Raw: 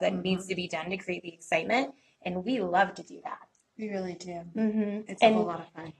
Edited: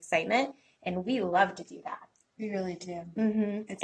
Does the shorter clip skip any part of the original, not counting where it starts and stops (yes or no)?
no